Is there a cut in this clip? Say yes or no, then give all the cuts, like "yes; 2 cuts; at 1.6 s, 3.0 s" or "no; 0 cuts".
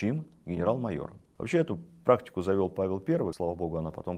yes; 1 cut; at 1.4 s